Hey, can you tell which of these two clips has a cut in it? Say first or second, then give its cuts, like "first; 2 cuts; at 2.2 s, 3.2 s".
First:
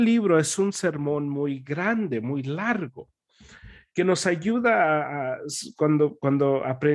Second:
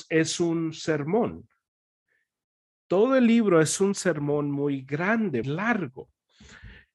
second; 1 cut; at 5.4 s